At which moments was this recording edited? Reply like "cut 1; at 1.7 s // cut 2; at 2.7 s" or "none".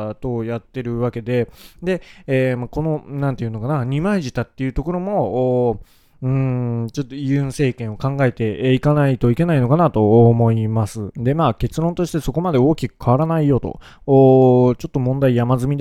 cut 1; at 11.1 s